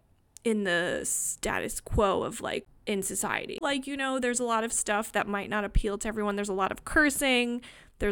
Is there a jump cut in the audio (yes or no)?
yes